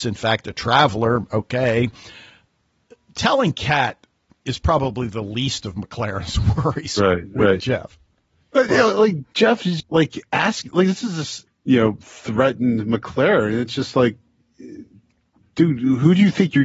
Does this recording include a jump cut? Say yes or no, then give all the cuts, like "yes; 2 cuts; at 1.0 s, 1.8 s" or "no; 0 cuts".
yes; 2 cuts; at 9.8 s, 11.5 s